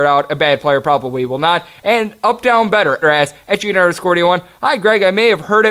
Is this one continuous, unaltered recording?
no; 1 cut; at 3.0 s

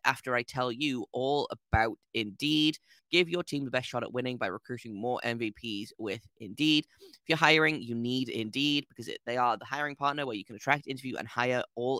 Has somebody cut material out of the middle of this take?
yes; 1 cut; at 3.0 s

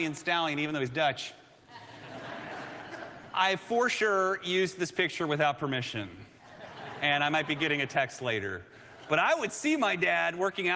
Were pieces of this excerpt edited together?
no; 0 cuts

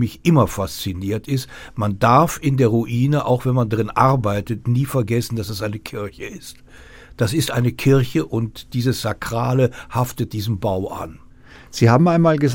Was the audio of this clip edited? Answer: no; 0 cuts

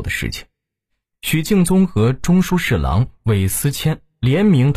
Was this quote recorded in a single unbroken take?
yes; 0 cuts

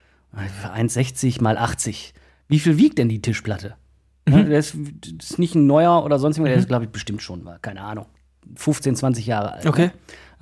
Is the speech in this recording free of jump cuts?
no; 1 cut; at 4.3 s

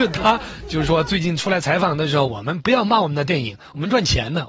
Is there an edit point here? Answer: yes; 1 cut; at 2.3 s

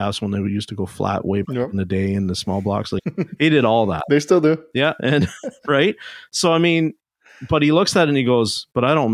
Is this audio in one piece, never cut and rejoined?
yes; 0 cuts

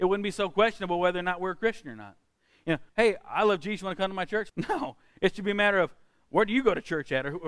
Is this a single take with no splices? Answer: no; 2 cuts; at 2.9 s, 4.5 s

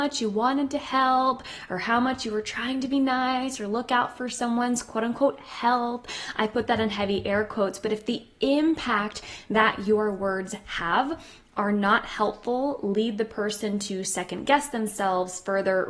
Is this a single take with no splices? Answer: yes; 0 cuts

